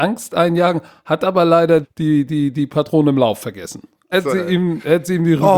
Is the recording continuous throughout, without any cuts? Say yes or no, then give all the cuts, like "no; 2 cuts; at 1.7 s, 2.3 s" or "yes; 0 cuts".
no; 2 cuts; at 1.8 s, 4.1 s